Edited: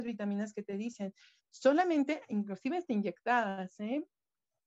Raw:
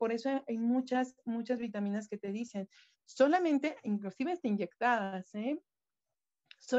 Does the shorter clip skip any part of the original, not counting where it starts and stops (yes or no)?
no